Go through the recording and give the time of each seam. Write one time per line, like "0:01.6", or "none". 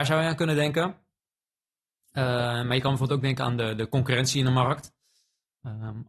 none